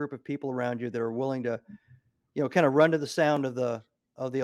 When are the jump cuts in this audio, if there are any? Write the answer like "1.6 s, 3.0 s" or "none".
none